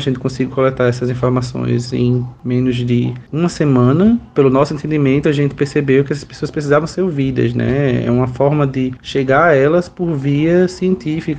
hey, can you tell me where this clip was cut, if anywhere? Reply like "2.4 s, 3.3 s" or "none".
none